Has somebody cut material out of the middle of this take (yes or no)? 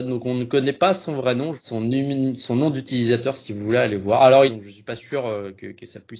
yes